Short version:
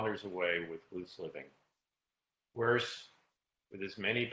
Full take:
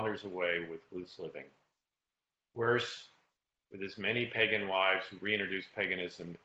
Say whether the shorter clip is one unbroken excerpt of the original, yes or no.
yes